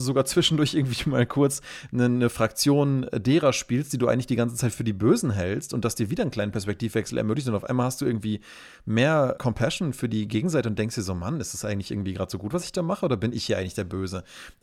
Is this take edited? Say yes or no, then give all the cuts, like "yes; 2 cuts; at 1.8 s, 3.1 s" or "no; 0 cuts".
yes; 1 cut; at 9.4 s